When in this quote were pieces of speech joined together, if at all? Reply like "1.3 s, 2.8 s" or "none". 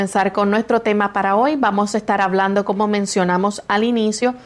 none